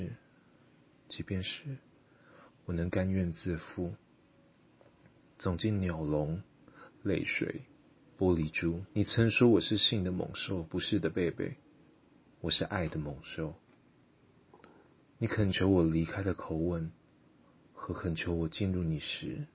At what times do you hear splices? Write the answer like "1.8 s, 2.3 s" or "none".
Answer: 8.9 s